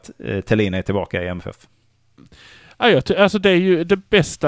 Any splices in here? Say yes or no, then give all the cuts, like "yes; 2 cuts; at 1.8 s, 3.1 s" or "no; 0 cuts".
no; 0 cuts